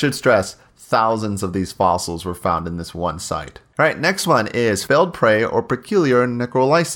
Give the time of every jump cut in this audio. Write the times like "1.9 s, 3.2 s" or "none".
3.7 s